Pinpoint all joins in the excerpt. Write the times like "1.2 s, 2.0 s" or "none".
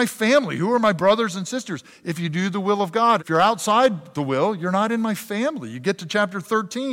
3.2 s